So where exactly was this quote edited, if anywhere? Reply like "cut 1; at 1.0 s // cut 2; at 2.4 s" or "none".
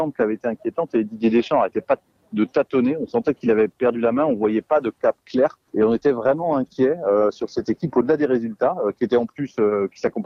cut 1; at 5.7 s